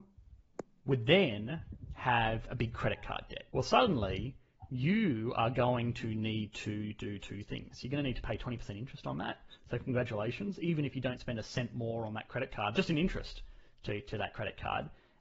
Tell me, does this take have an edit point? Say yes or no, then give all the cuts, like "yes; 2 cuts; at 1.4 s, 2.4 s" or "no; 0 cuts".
yes; 2 cuts; at 3.5 s, 12.7 s